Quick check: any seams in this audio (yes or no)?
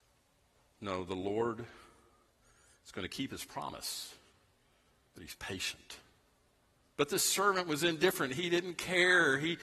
yes